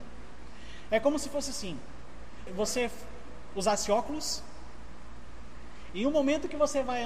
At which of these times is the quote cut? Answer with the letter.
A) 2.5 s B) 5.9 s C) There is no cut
A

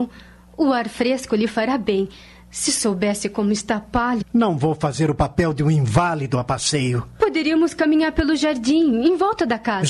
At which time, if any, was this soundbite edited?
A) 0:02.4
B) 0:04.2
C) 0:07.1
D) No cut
B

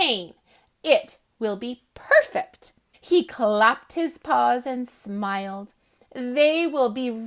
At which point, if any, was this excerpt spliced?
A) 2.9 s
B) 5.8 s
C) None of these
A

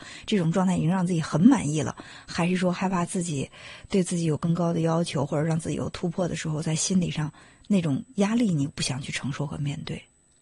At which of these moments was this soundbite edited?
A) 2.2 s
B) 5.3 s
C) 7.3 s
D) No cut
D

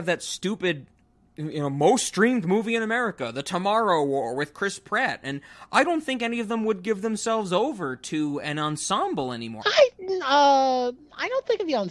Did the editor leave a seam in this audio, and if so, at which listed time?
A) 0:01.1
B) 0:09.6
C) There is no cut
B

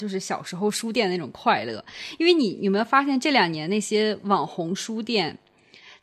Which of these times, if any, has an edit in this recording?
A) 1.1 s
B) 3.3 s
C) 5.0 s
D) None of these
D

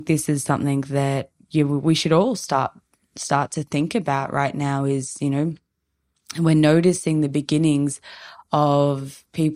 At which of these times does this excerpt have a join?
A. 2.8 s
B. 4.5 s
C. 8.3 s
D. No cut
D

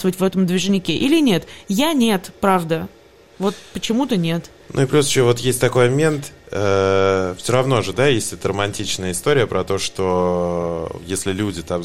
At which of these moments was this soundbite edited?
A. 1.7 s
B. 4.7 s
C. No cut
C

